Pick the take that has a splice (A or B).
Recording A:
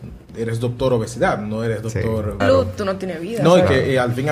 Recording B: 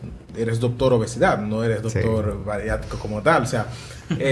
A